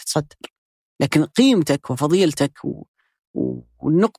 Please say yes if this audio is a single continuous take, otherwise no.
yes